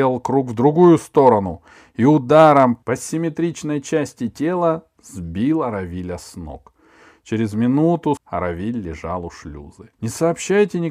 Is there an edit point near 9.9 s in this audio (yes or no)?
yes